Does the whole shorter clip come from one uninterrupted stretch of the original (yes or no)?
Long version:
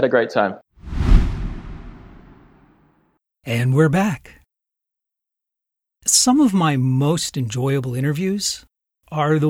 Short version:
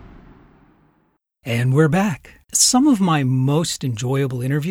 no